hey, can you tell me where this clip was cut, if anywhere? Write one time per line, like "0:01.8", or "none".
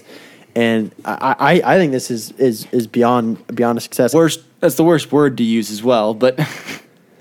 0:04.1